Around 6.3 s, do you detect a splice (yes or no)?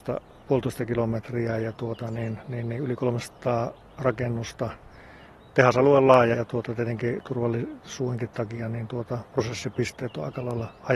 yes